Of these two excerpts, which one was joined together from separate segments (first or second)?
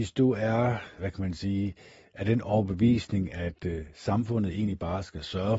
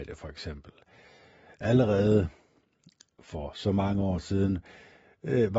first